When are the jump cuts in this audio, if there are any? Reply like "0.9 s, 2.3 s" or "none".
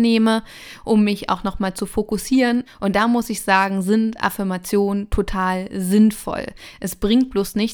2.7 s